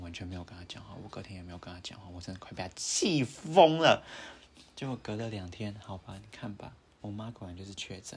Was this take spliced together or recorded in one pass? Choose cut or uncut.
uncut